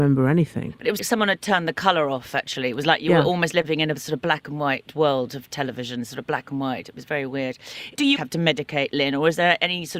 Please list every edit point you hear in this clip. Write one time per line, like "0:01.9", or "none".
0:01.0
0:08.2